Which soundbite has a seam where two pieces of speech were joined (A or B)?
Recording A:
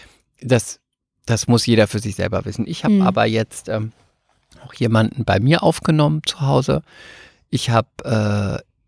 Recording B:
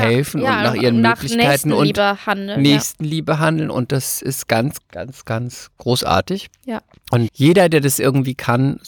B